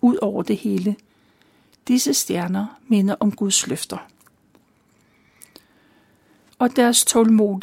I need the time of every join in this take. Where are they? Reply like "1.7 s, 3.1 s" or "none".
6.5 s